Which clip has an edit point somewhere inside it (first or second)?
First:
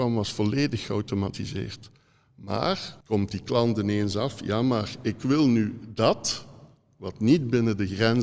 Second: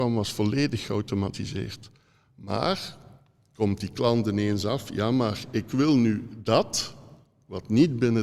first